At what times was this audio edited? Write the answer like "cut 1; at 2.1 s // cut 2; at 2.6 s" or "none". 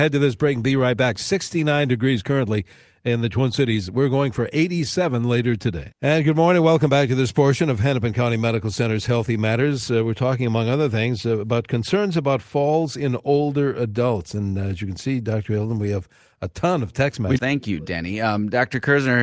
cut 1; at 17.4 s